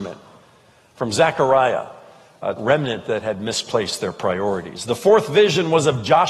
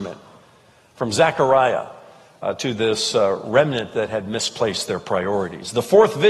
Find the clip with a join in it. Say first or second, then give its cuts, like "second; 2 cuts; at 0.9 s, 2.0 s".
first; 1 cut; at 2.6 s